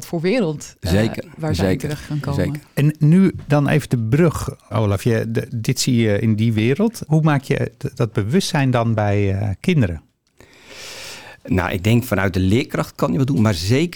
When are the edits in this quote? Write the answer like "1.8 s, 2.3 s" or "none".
4.7 s, 7.1 s

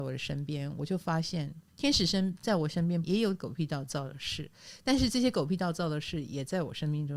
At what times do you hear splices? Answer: 1.7 s, 3.0 s

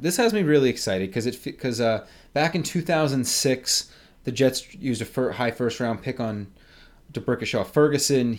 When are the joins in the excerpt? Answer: none

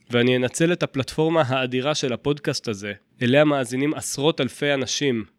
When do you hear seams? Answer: none

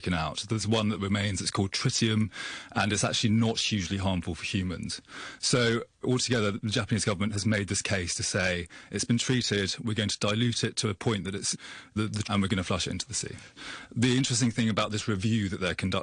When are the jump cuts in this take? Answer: 12.2 s

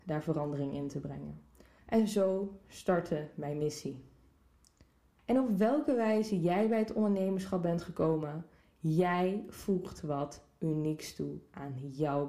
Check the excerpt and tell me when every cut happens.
1.8 s, 5.2 s

